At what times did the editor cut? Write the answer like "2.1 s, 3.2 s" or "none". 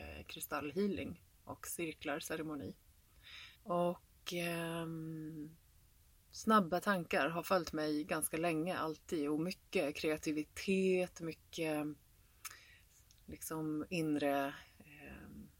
3.6 s

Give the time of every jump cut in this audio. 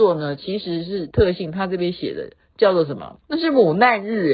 3.3 s

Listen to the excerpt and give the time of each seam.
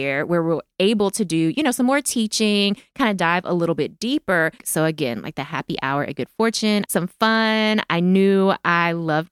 4.6 s, 6.9 s

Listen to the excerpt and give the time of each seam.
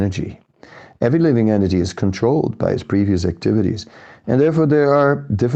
none

